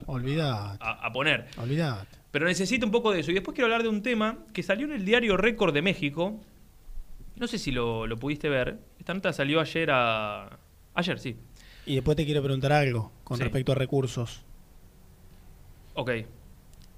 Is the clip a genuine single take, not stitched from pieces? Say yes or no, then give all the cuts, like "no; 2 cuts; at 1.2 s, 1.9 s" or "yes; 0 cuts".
yes; 0 cuts